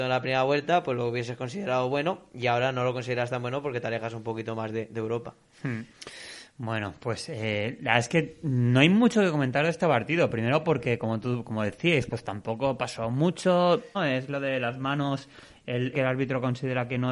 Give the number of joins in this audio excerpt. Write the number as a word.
two